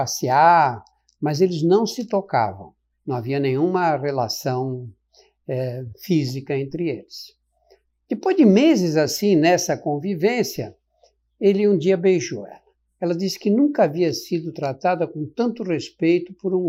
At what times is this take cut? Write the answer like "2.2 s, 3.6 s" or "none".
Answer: none